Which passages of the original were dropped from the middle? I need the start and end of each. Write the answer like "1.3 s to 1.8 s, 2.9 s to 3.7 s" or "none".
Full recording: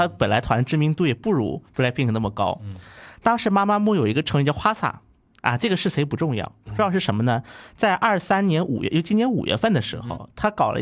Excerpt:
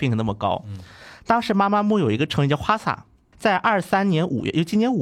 5.3 s to 7.7 s